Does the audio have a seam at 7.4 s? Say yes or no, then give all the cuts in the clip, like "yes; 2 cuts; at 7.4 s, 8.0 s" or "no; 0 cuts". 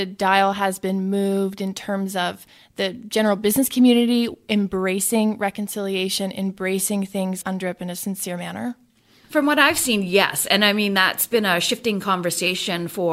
yes; 1 cut; at 7.4 s